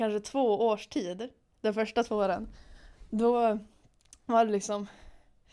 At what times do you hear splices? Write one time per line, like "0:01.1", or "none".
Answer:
none

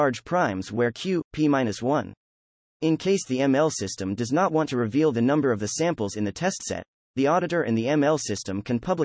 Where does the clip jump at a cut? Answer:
0:02.7

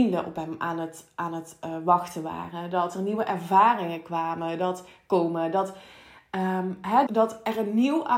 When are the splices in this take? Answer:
0:07.1

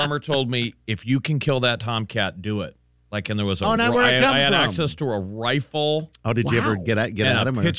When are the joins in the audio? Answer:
none

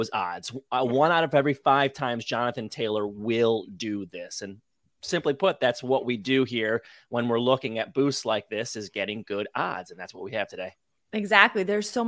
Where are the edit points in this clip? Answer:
none

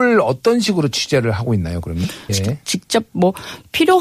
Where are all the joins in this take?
0:02.3

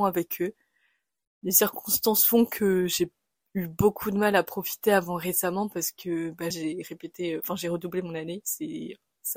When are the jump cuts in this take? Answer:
0:06.5

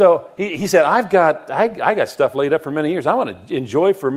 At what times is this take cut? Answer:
none

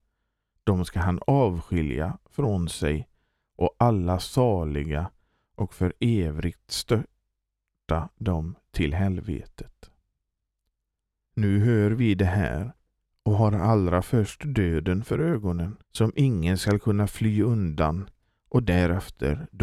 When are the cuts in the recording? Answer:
0:11.3
0:15.8

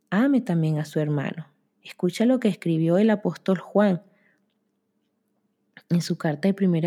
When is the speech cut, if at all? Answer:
0:01.7

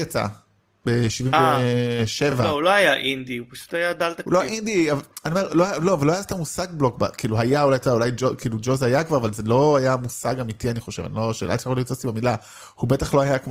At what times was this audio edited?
none

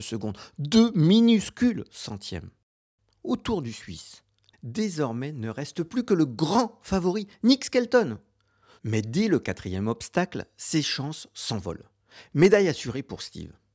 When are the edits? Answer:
0:04.5
0:08.8

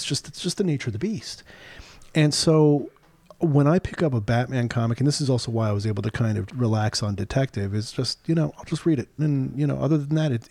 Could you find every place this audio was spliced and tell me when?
0:06.5
0:09.2

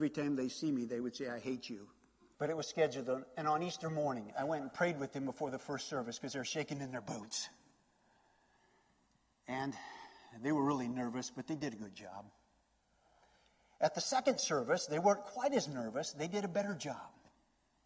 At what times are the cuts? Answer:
0:02.3

